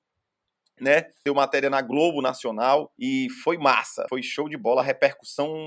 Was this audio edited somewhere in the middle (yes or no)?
yes